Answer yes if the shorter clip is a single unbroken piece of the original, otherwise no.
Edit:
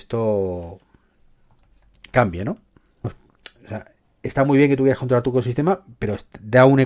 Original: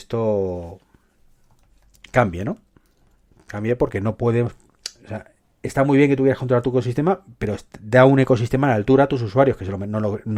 no